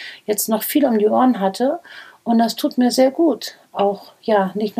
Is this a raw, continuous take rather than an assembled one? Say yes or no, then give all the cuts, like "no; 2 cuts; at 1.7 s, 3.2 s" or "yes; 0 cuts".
yes; 0 cuts